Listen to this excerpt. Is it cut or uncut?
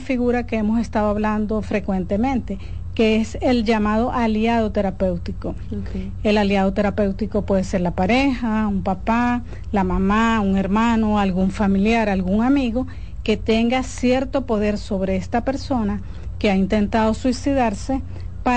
uncut